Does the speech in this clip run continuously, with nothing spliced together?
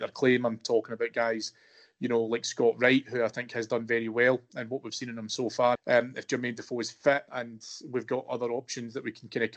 no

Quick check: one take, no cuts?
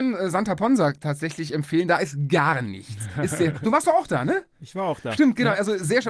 yes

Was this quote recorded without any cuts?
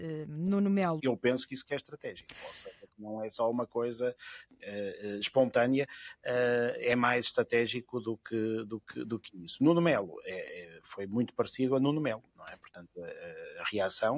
no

